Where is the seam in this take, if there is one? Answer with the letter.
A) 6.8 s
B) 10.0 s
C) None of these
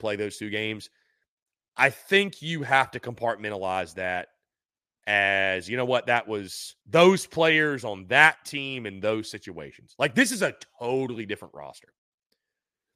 A